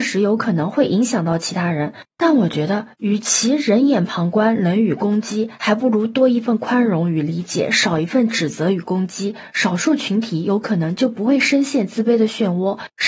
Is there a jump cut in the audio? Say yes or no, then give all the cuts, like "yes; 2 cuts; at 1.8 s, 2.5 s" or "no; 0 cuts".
no; 0 cuts